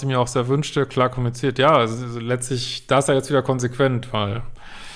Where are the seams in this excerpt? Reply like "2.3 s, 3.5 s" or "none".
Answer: none